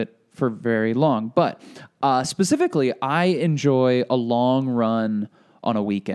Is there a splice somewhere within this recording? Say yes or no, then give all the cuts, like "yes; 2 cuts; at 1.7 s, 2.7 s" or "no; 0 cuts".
no; 0 cuts